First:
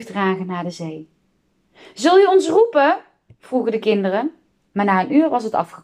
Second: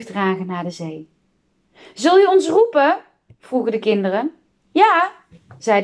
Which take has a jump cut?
first; 1 cut; at 4.7 s

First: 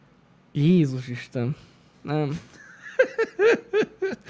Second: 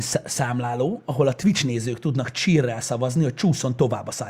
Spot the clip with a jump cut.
first; 1 cut; at 1.9 s

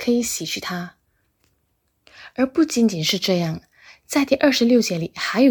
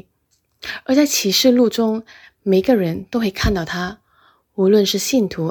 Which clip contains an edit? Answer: second; 1 cut; at 2.2 s

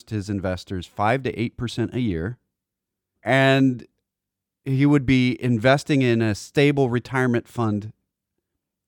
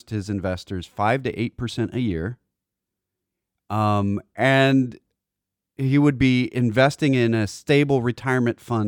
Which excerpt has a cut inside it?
first; 1 cut; at 3.2 s

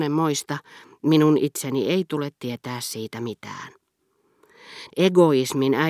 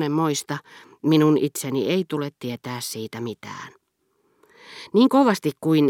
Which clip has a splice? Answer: first; 1 cut; at 4.9 s

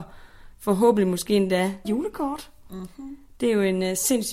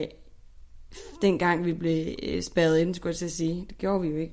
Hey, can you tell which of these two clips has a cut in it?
first; 1 cut; at 1.8 s

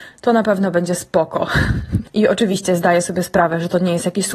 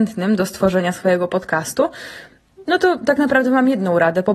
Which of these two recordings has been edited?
first; 1 cut; at 2.0 s

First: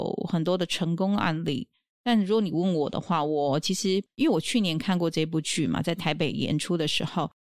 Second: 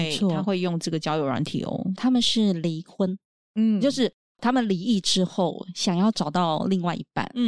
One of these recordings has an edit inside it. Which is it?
second; 1 cut; at 2.0 s

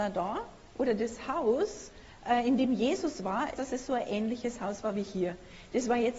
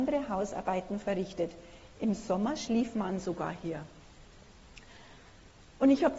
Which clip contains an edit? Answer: first; 1 cut; at 3.5 s

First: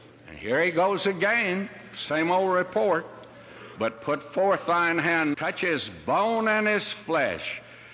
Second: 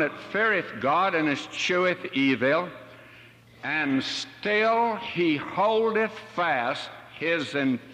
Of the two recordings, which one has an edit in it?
first; 2 cuts; at 3.8 s, 5.3 s

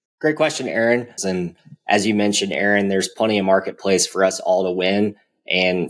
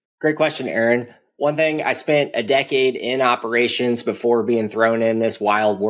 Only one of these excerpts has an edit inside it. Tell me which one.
first; 1 cut; at 1.2 s

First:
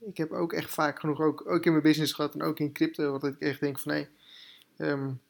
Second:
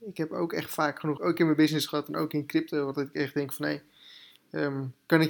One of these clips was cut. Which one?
second; 1 cut; at 1.2 s

